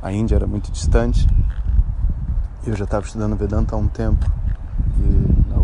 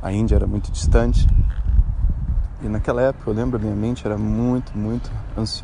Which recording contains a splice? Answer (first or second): second